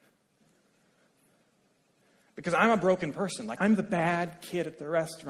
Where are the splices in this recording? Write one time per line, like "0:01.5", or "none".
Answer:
0:03.6